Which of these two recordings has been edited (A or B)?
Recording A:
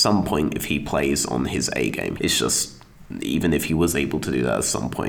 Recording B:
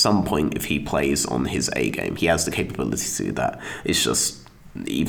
A